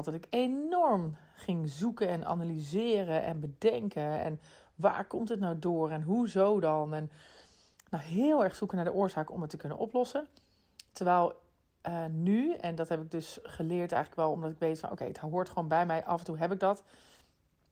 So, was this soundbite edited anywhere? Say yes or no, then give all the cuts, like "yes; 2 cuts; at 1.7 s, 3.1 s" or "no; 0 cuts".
no; 0 cuts